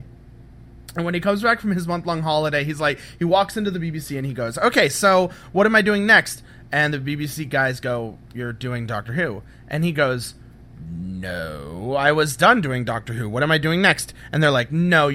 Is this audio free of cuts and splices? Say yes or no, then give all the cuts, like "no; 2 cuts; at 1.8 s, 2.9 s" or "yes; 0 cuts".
yes; 0 cuts